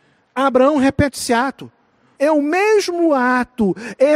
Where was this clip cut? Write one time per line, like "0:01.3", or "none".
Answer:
0:02.2